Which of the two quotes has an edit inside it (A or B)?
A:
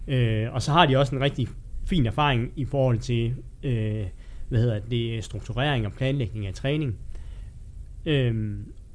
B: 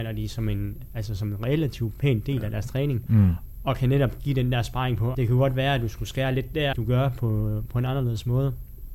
B